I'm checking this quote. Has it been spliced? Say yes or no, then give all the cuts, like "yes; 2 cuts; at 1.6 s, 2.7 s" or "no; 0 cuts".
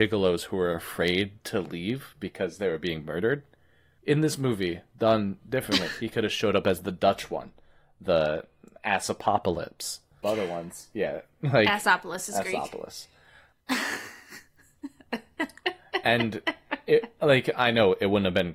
yes; 1 cut; at 10.2 s